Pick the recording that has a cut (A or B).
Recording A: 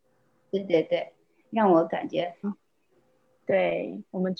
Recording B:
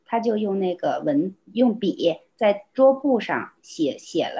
A